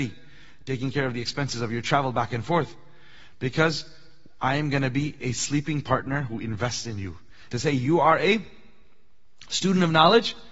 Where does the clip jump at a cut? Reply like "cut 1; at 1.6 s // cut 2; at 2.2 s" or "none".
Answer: cut 1; at 7.5 s